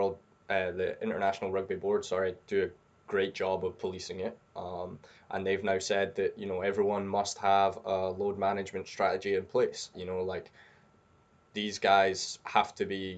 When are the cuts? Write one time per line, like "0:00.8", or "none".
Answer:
0:09.9